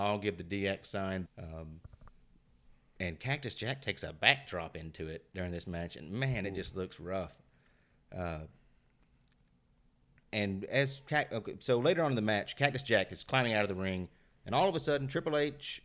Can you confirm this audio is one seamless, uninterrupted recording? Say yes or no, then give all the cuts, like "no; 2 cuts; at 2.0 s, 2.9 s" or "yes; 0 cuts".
no; 1 cut; at 1.2 s